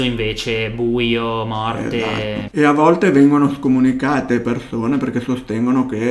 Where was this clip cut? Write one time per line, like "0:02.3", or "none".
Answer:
0:02.5